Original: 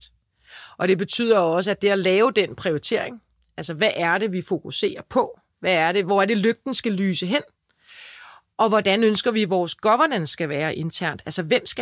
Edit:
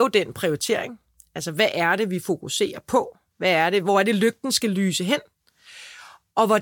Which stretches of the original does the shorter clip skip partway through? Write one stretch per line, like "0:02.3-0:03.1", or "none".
none